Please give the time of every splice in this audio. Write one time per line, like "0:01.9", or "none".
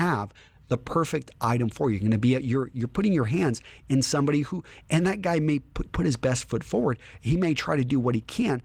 none

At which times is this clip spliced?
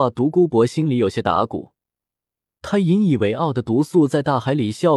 none

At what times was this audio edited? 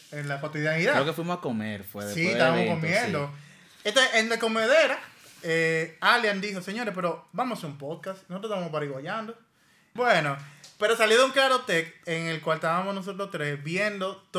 0:10.0

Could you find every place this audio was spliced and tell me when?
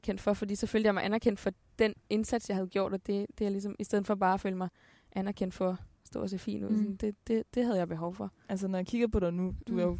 0:06.7

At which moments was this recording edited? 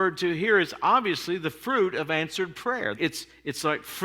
0:02.9

